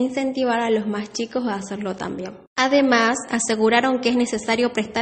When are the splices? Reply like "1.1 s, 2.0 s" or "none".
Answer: 2.5 s